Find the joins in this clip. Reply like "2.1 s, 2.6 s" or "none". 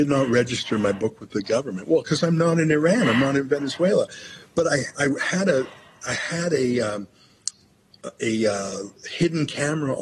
9.0 s

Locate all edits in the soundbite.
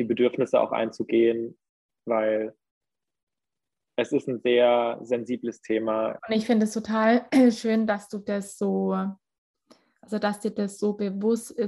6.2 s

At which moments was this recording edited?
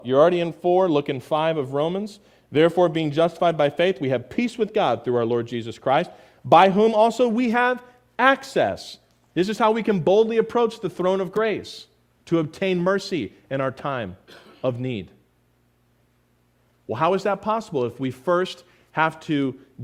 none

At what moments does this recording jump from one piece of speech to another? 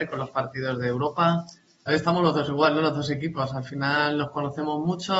1.9 s

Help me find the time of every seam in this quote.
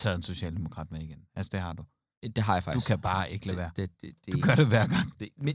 3.9 s

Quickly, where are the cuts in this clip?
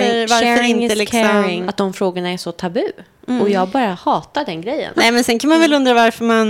1.7 s, 4.9 s

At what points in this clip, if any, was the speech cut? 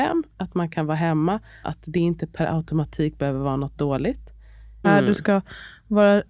1.6 s, 4.8 s

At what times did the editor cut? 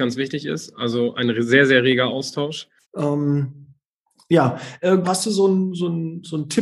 2.8 s, 5.0 s

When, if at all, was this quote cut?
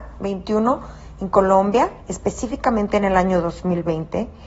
2.0 s

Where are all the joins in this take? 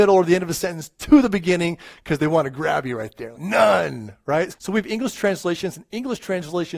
3.3 s, 4.5 s

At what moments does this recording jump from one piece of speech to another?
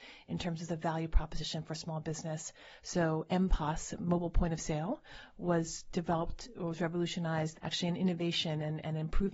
2.8 s, 7.5 s

